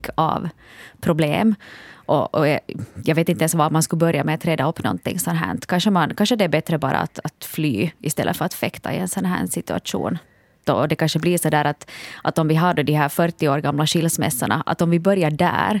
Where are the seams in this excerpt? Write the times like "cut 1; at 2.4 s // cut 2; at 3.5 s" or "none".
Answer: cut 1; at 10.6 s